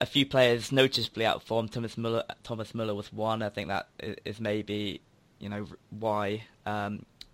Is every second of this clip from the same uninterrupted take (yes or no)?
yes